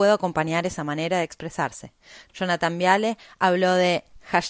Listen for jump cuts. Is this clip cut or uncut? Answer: cut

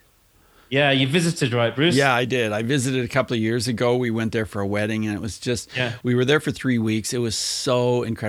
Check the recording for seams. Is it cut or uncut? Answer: uncut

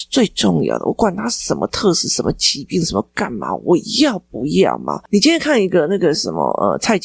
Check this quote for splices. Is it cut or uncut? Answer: uncut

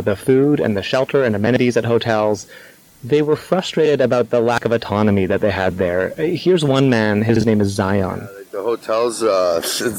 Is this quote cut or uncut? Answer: uncut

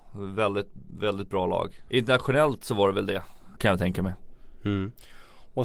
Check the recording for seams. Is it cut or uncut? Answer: cut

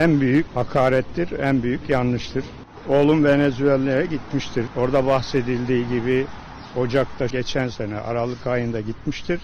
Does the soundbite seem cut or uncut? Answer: cut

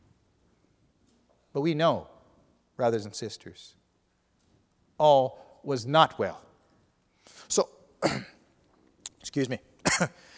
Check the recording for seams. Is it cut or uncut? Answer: uncut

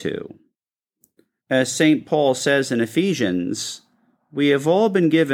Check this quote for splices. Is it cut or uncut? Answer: cut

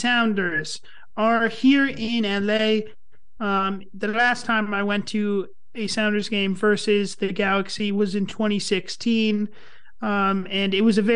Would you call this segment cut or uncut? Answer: cut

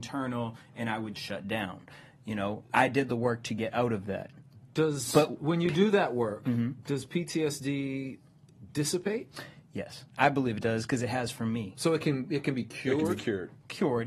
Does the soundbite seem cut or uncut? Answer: cut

